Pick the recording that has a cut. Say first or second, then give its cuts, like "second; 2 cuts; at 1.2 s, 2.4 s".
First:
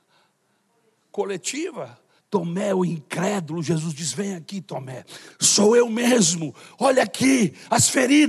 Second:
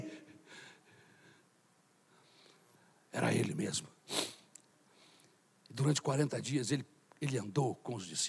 first; 2 cuts; at 2.2 s, 5.3 s